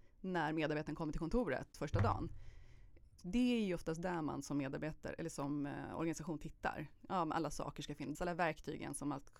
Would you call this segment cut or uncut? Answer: cut